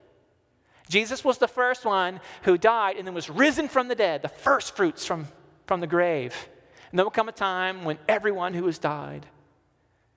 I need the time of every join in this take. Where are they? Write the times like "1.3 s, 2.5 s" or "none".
none

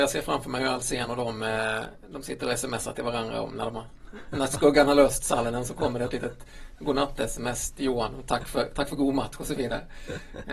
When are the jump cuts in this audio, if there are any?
7.7 s

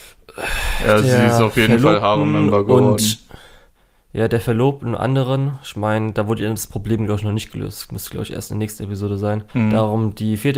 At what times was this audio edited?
9.5 s

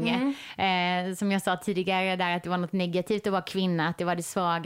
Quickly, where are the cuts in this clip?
none

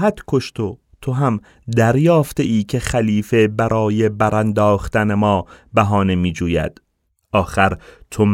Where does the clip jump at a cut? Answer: 7.2 s

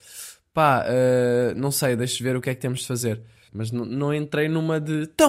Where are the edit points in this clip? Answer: 3.5 s

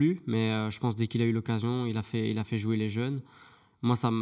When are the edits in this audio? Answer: none

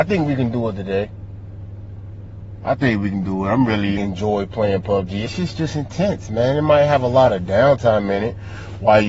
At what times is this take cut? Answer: 4.0 s, 5.3 s

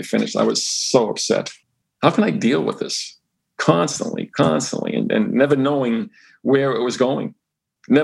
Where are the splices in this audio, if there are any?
1.8 s, 4.3 s

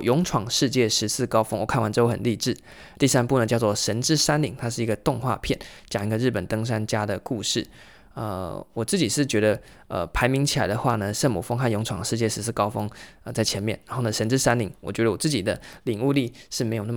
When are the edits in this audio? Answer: none

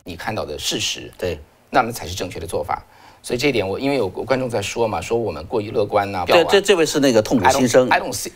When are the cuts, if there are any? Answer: 6.3 s

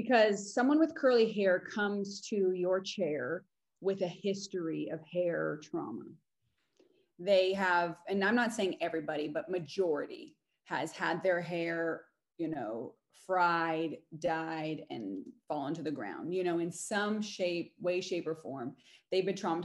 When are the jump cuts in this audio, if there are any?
none

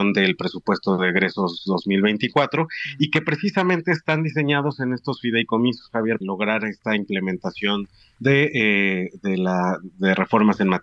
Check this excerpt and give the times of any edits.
6.2 s

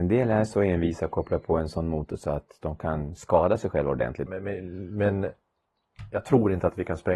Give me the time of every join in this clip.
4.3 s

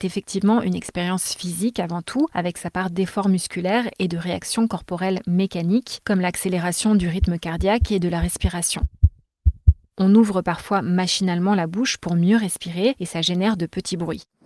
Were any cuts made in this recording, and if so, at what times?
none

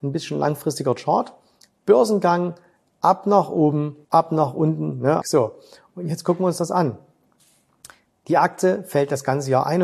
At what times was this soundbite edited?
4.0 s, 5.2 s

